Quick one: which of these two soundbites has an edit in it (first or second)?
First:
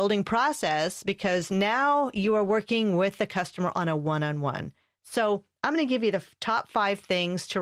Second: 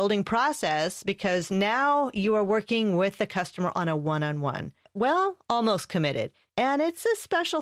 second